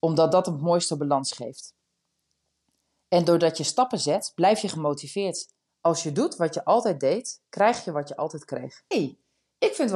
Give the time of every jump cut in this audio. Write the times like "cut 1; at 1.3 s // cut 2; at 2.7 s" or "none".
cut 1; at 5.7 s // cut 2; at 8.9 s